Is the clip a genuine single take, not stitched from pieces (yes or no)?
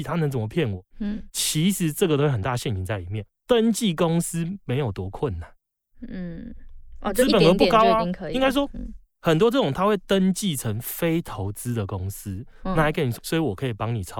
no